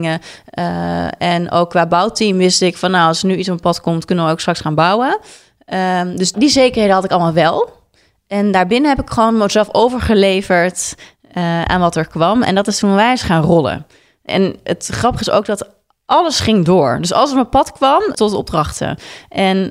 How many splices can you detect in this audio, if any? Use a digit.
2